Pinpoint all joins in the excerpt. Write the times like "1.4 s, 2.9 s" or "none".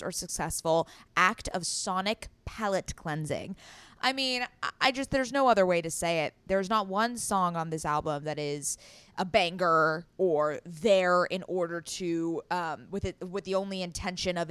6.5 s